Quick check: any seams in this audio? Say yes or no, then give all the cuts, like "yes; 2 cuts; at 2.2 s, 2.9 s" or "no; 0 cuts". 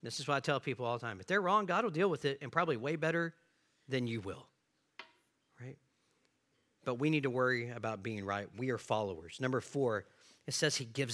no; 0 cuts